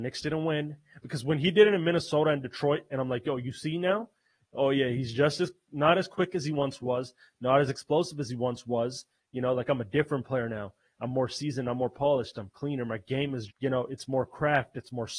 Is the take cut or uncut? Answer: cut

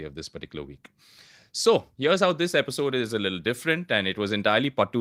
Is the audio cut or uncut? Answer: uncut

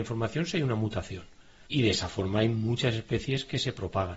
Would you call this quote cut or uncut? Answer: cut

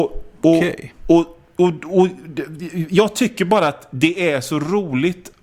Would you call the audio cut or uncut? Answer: uncut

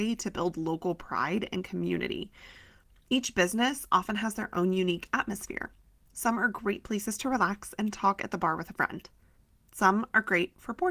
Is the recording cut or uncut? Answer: uncut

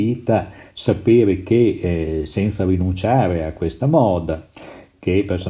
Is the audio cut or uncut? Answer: uncut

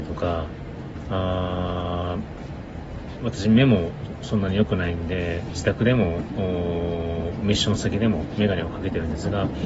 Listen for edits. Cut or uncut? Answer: cut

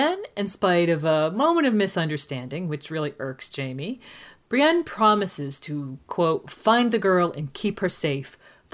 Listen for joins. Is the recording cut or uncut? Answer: uncut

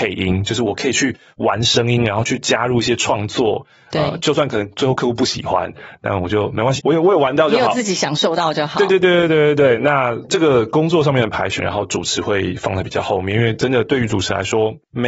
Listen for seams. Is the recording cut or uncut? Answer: cut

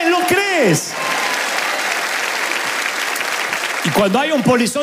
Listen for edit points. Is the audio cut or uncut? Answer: uncut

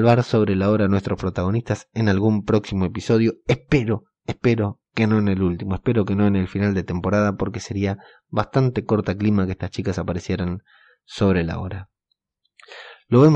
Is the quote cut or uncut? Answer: uncut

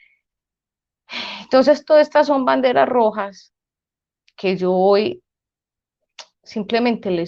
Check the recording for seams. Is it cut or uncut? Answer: uncut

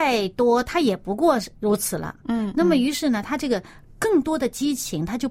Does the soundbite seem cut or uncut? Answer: cut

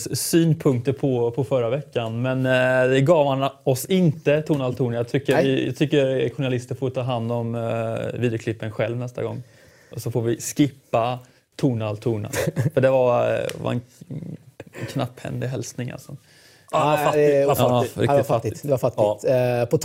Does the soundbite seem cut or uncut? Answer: uncut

